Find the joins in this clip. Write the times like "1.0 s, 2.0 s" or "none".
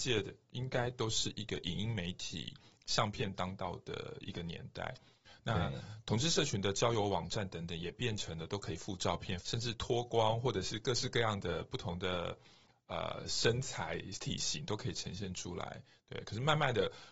9.4 s